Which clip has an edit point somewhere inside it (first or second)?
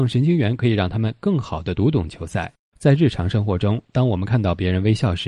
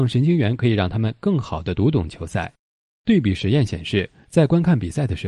first